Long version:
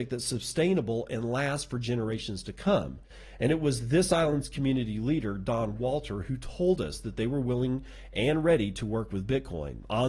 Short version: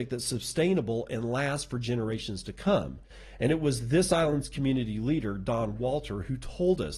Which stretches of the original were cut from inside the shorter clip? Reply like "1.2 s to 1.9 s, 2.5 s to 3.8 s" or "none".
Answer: none